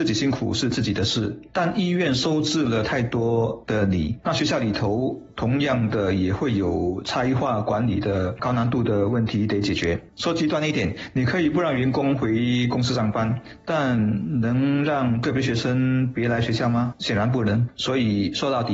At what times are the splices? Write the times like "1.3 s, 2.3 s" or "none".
4.2 s, 17.7 s